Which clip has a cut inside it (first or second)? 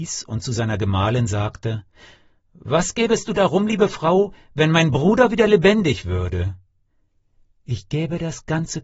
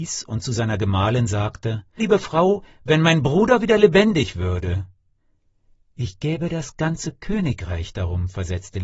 second